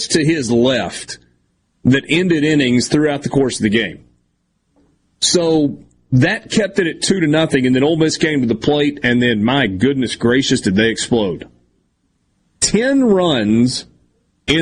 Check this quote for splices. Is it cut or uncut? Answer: uncut